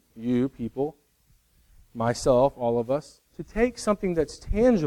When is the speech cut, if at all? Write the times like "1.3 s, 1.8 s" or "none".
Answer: 3.3 s